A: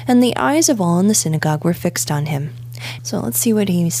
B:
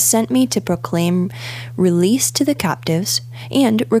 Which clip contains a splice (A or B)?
A